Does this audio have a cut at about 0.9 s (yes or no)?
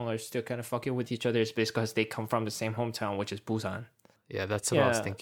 no